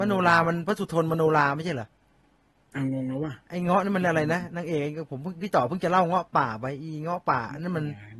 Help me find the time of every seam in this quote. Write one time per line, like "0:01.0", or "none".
none